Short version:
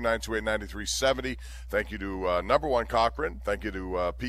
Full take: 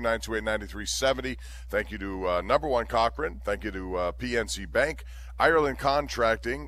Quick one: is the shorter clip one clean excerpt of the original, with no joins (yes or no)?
yes